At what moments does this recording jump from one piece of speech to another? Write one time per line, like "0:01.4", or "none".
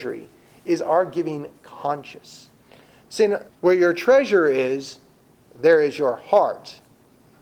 0:03.5

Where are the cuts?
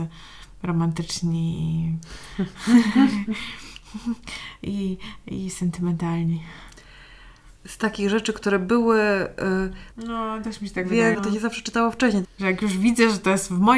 0:09.9
0:11.1
0:12.2

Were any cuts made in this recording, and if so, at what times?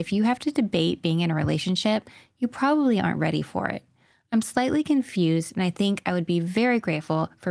none

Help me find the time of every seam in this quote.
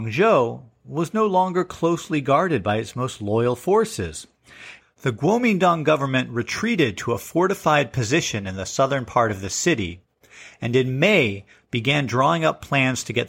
0:04.8

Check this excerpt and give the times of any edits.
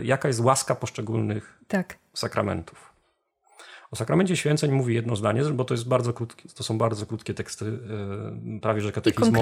none

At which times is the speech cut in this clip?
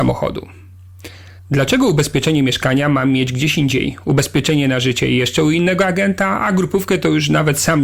0:01.4

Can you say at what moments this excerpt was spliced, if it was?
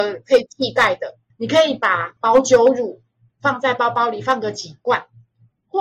0:01.3

